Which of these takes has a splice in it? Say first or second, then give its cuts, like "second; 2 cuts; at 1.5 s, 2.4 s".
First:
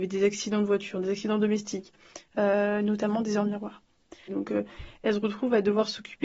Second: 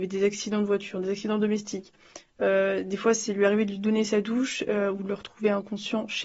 first; 2 cuts; at 2.3 s, 4.3 s